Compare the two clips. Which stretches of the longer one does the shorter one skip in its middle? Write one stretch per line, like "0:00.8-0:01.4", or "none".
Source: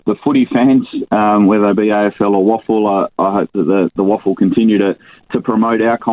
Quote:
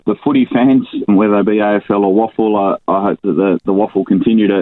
0:01.1-0:01.4